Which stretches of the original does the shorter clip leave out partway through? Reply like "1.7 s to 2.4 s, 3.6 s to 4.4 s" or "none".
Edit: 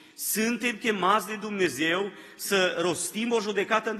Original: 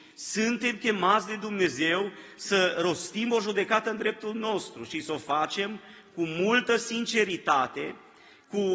none